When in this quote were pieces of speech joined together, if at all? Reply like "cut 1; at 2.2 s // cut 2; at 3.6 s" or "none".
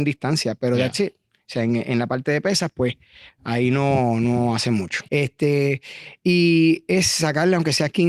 cut 1; at 5.1 s